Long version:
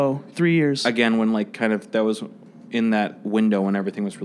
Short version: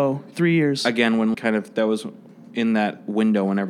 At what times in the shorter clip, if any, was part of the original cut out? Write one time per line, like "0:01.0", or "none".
0:01.3